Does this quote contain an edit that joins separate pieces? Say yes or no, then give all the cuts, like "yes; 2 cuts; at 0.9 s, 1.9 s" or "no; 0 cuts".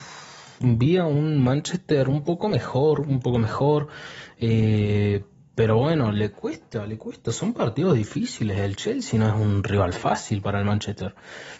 no; 0 cuts